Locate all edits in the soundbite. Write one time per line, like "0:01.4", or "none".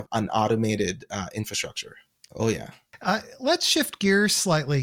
0:02.3